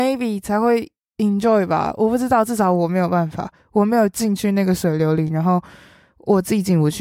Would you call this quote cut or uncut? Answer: uncut